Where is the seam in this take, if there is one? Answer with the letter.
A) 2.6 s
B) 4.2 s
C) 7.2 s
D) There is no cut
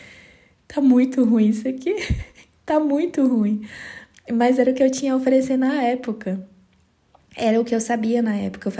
D